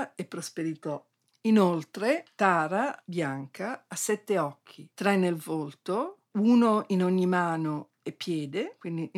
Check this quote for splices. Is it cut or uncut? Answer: uncut